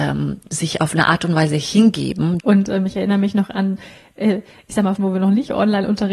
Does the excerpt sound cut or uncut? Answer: cut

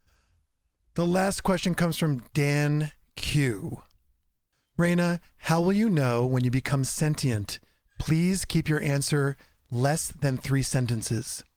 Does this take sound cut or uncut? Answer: uncut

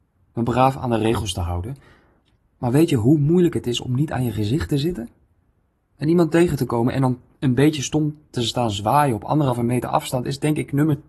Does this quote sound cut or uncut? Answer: uncut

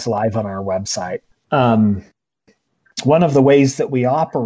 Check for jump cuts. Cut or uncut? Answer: cut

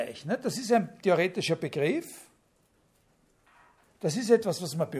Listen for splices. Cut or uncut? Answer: uncut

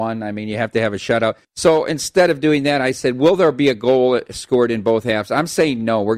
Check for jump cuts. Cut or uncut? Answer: cut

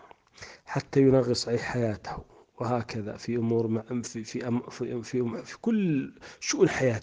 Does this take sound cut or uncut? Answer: uncut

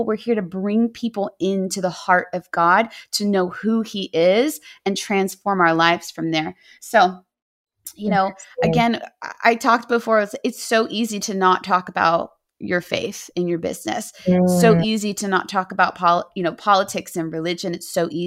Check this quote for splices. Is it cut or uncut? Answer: uncut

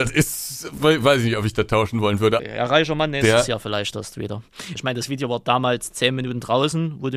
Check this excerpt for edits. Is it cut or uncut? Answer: cut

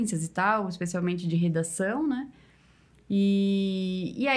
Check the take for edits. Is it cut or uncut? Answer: uncut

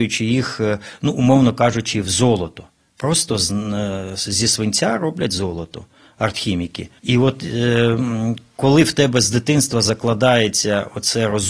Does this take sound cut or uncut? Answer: cut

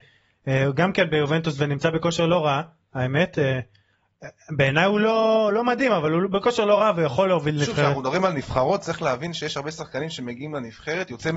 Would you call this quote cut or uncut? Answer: uncut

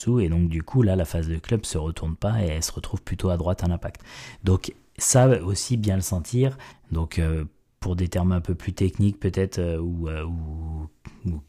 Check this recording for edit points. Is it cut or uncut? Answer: cut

